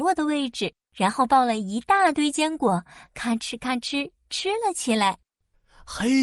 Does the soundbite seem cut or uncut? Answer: uncut